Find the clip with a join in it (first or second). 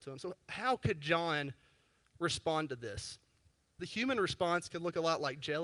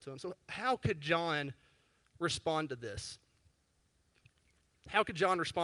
first